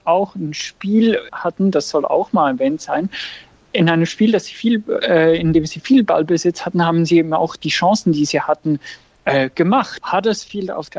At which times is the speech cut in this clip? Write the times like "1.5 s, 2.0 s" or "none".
1.3 s, 10.0 s